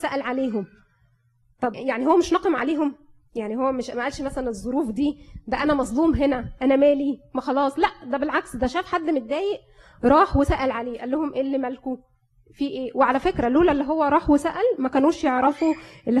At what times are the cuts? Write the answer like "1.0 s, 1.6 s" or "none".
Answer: 1.7 s